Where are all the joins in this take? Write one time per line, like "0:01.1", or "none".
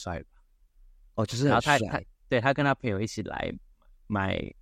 none